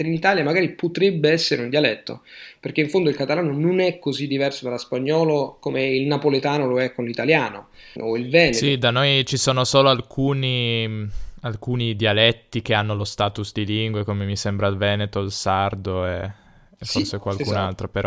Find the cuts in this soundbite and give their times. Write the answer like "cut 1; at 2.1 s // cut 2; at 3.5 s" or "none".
cut 1; at 8.0 s